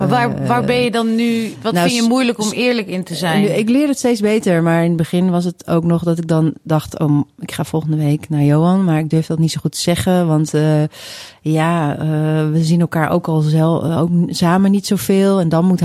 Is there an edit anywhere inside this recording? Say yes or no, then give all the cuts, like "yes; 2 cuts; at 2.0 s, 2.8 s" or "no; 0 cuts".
no; 0 cuts